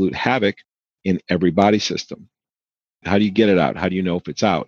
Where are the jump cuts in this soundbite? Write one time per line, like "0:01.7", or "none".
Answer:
none